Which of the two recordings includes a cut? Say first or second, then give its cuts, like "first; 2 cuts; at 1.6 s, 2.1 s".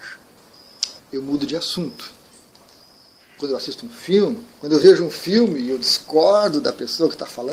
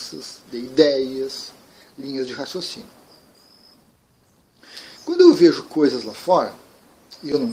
first; 3 cuts; at 1.0 s, 3.4 s, 4.6 s